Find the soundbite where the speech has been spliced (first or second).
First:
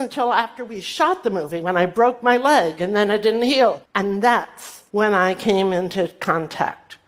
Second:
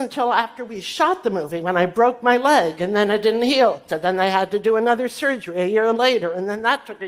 first